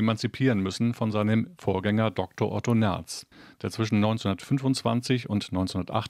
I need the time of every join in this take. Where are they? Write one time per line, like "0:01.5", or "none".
none

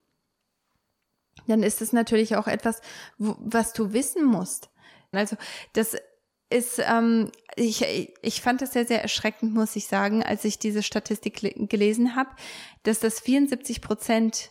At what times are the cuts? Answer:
0:05.1

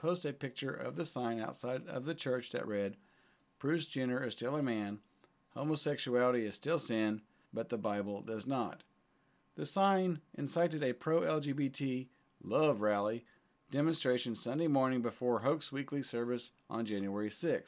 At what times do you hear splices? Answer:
0:07.5

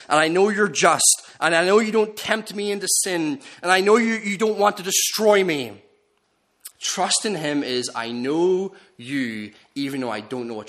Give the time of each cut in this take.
0:06.7

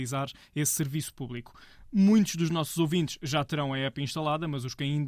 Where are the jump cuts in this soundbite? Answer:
none

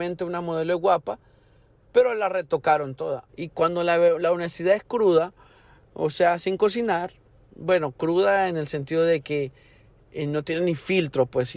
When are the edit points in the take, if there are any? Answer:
0:03.3

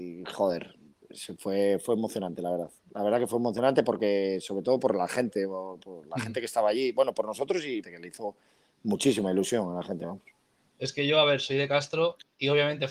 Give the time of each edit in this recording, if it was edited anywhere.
0:07.8

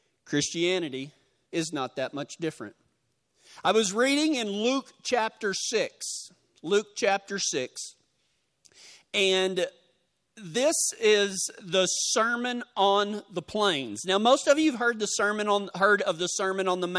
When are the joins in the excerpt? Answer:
0:15.7

